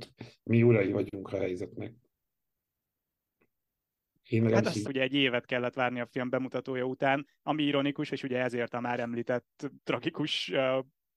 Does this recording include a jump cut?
yes; 3 cuts; at 4.8 s, 8.1 s, 9.7 s

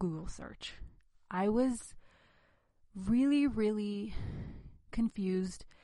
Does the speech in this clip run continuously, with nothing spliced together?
yes; 0 cuts

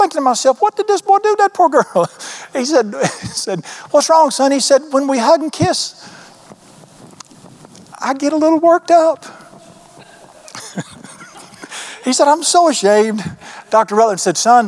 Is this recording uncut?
yes; 0 cuts

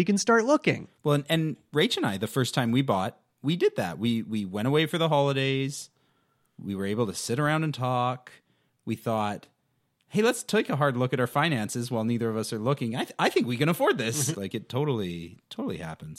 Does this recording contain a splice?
yes; 1 cut; at 14.3 s

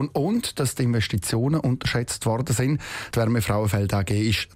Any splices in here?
yes; 1 cut; at 3.1 s

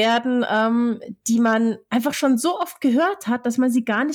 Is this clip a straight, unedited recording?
yes; 0 cuts

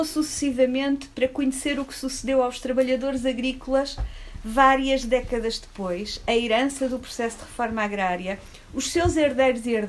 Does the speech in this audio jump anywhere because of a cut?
no; 0 cuts

